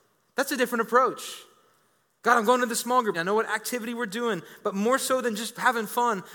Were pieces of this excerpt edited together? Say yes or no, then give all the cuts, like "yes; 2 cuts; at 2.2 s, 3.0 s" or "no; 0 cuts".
yes; 1 cut; at 3.1 s